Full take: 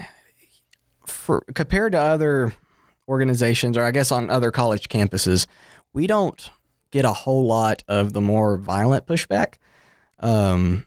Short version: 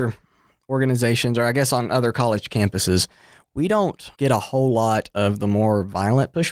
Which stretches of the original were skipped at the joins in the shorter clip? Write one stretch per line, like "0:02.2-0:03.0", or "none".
0:06.5-0:06.9